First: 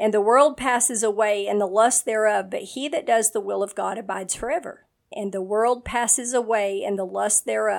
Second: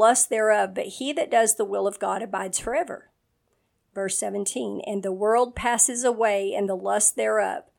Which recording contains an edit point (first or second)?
first